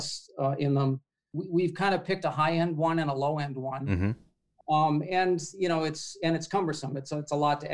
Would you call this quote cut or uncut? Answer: cut